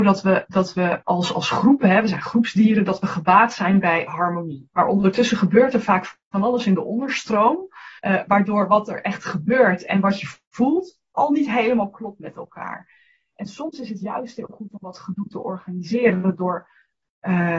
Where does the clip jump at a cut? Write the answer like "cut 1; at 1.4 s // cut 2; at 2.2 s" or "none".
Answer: cut 1; at 8.0 s